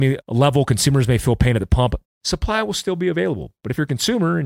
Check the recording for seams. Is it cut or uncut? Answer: cut